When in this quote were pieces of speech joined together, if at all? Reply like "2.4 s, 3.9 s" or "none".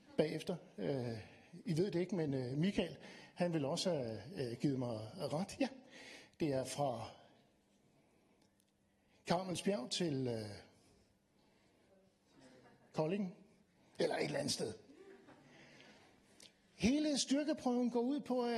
none